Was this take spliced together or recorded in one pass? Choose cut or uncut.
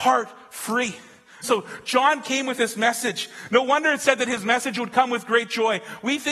cut